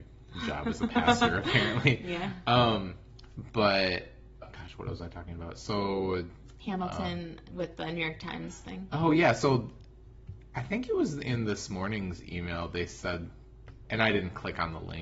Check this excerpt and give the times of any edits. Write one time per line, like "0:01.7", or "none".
0:04.4